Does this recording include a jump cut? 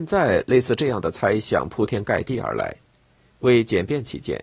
no; 0 cuts

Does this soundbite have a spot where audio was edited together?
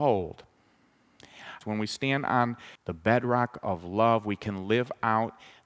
yes; 2 cuts; at 1.6 s, 2.8 s

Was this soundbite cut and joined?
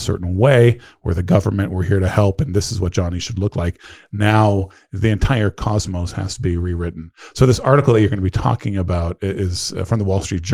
no; 0 cuts

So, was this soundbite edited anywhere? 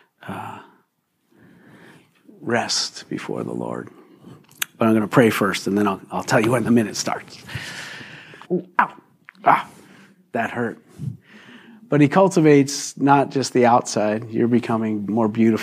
yes; 1 cut; at 8.4 s

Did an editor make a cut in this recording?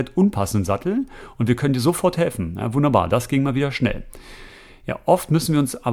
no; 0 cuts

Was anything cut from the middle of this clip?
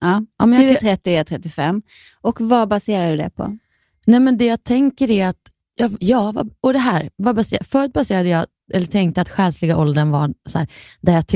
no; 0 cuts

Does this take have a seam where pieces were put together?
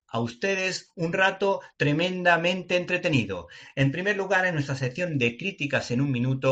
no; 0 cuts

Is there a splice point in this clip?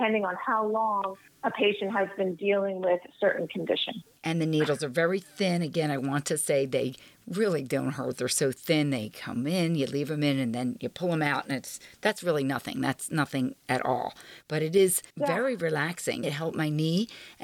yes; 2 cuts; at 15.1 s, 16.2 s

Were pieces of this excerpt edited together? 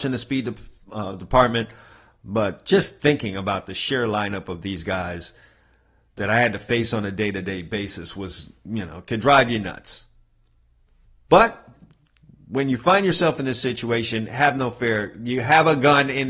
no; 0 cuts

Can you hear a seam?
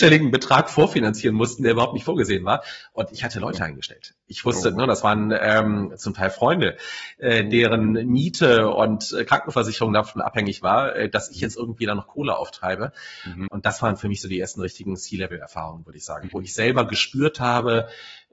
yes; 1 cut; at 13.5 s

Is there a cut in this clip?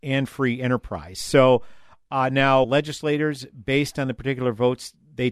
yes; 1 cut; at 2.6 s

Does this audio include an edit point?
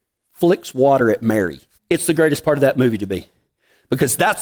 yes; 1 cut; at 1.7 s

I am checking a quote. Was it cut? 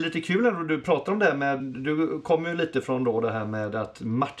yes; 1 cut; at 1.6 s

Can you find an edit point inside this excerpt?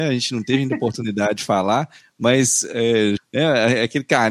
yes; 2 cuts; at 2.0 s, 3.2 s

